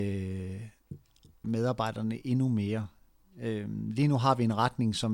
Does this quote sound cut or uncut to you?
cut